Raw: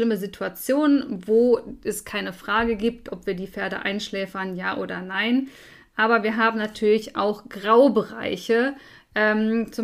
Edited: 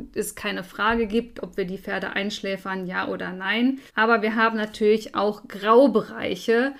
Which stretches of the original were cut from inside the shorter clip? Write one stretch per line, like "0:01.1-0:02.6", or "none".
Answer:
0:05.6-0:05.9